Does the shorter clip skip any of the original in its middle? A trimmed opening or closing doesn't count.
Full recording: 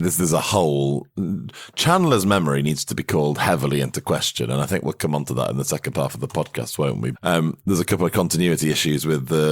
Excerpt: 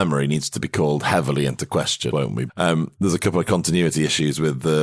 yes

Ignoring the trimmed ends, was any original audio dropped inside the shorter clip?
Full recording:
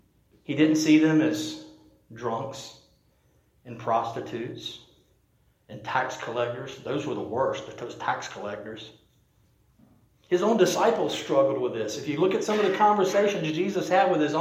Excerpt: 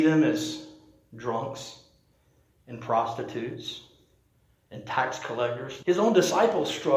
yes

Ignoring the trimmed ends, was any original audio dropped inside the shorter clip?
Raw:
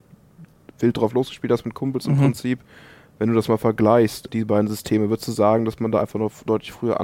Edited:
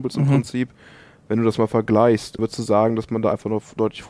yes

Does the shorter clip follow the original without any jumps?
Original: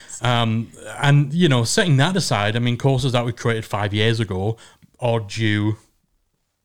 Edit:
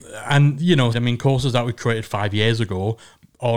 no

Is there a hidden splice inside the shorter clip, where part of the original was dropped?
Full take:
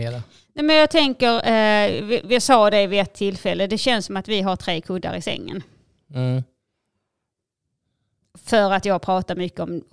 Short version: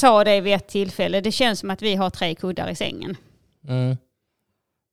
no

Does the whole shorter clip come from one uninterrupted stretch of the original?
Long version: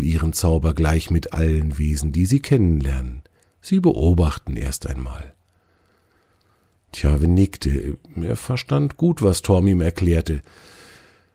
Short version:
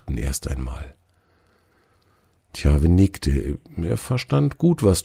yes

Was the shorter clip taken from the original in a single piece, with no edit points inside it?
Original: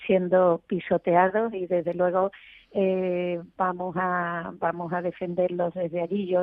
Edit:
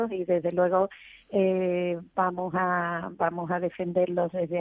yes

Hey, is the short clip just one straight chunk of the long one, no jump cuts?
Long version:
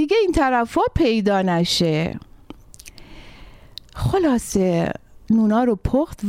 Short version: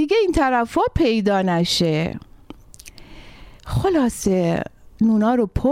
no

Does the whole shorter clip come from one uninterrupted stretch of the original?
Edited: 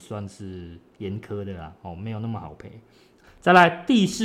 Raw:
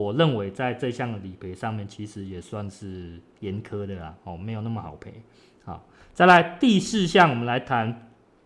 no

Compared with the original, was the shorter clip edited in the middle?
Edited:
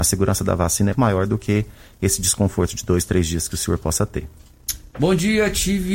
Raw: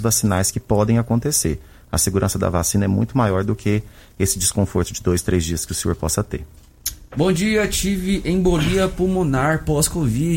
yes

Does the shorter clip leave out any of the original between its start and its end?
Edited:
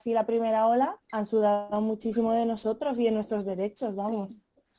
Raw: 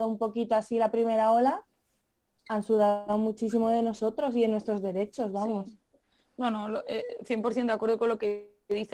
yes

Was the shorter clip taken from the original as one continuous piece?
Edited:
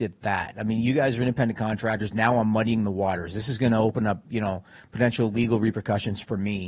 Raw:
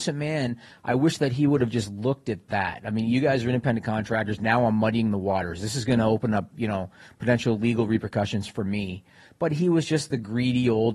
yes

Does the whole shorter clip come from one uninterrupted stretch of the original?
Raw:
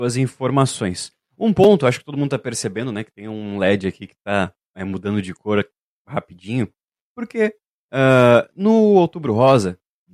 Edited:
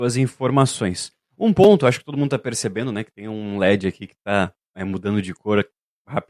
yes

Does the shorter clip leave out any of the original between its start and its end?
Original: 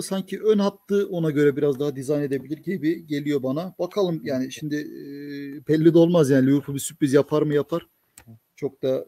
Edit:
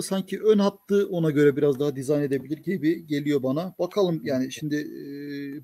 no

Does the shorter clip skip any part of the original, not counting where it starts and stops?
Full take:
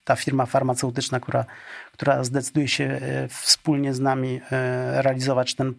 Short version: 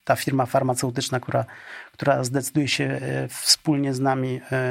no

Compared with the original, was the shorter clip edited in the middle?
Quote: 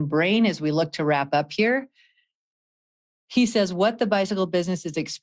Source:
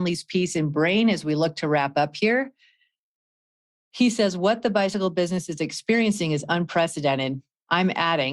no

